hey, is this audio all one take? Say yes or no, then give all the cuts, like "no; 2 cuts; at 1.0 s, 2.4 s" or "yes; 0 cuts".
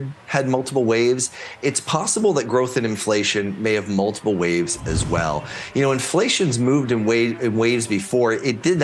yes; 0 cuts